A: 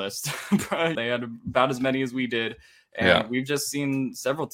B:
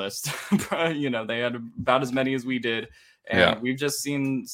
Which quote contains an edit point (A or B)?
A